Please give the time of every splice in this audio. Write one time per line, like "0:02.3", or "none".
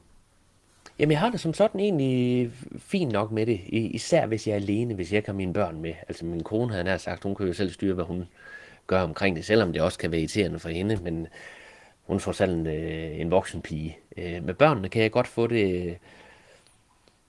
0:06.2